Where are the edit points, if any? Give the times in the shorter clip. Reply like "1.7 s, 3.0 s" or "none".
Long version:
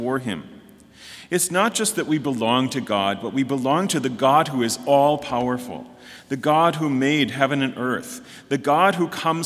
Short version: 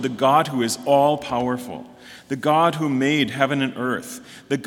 none